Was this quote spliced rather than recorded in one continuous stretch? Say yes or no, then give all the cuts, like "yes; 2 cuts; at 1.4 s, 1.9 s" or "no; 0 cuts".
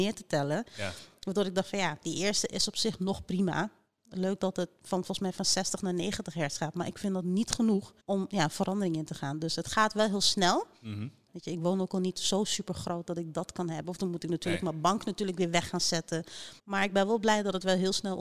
yes; 3 cuts; at 8.0 s, 11.3 s, 16.6 s